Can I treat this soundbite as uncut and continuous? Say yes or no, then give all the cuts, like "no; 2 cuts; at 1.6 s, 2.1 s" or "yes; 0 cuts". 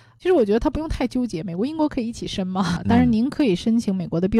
no; 1 cut; at 2.8 s